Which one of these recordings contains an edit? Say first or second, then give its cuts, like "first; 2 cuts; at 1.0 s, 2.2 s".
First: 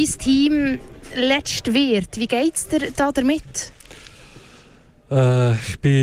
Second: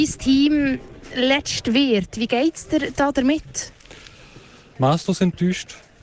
second; 1 cut; at 4.7 s